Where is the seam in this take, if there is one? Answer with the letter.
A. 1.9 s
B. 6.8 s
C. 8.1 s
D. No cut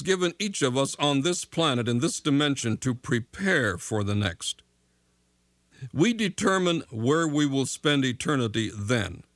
B